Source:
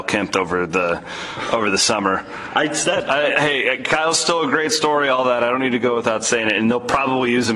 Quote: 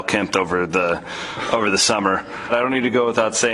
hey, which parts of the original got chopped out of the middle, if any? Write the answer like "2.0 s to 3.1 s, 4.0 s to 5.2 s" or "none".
2.5 s to 5.4 s